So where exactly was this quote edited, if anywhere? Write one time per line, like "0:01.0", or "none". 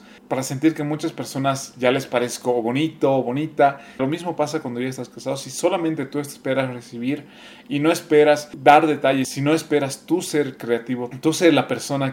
0:04.0